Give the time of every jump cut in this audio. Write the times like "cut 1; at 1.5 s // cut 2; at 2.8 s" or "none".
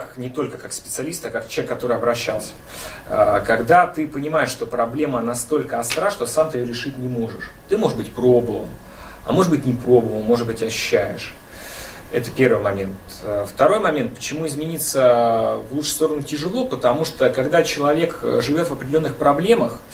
none